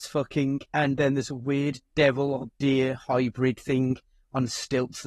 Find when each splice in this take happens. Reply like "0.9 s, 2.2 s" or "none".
none